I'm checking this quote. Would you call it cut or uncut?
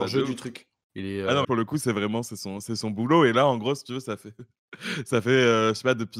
cut